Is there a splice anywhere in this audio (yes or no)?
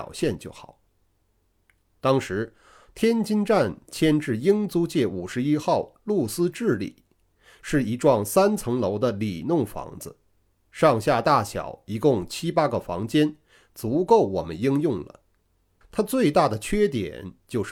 yes